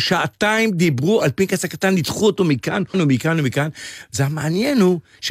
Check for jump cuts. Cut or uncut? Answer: cut